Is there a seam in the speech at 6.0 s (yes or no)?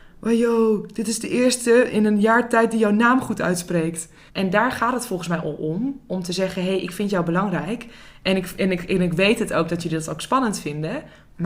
no